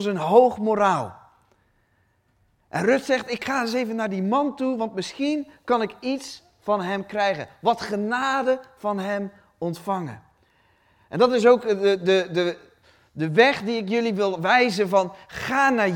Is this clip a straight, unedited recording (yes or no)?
yes